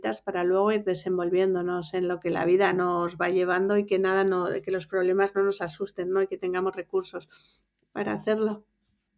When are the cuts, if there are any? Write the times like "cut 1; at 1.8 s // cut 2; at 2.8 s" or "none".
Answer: none